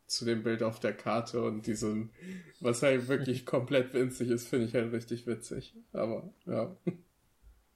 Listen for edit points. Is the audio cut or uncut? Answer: uncut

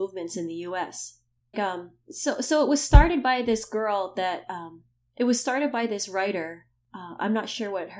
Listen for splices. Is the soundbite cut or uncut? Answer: cut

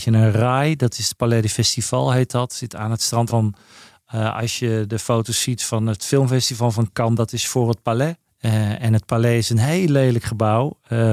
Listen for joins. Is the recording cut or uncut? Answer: cut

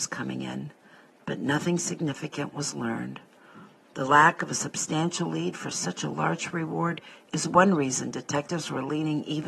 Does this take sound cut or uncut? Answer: uncut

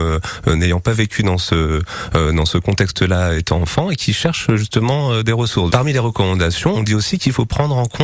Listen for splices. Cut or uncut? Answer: cut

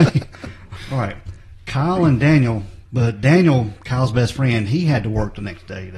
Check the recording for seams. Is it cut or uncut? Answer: cut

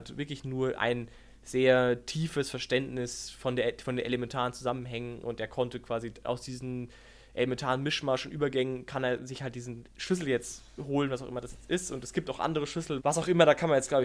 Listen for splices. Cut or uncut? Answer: cut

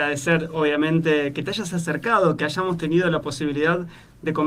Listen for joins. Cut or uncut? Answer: uncut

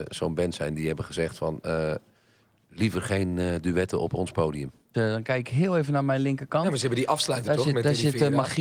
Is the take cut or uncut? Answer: cut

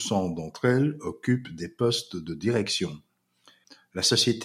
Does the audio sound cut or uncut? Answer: uncut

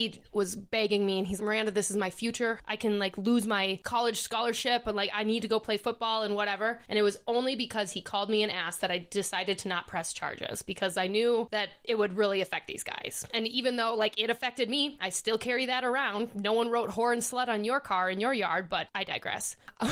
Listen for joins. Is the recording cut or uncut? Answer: cut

